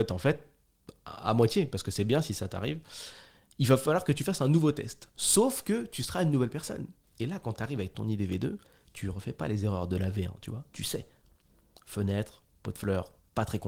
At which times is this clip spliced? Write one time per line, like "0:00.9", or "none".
0:07.0